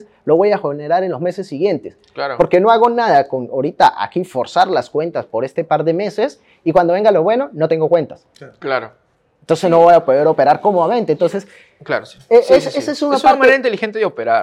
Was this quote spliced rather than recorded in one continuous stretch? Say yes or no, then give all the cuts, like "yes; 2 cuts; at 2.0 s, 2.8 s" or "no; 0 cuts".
no; 0 cuts